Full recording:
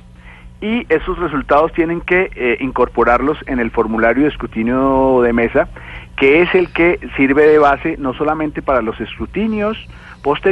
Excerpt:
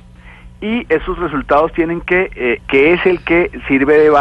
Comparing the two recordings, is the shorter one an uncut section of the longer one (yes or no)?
no